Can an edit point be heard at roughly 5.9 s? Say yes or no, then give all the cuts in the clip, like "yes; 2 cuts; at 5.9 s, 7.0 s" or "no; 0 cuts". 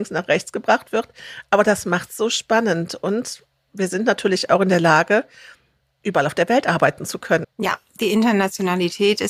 no; 1 cut; at 7.4 s